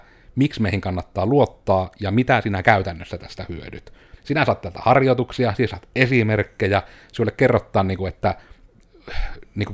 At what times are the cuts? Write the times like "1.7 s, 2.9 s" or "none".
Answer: 4.2 s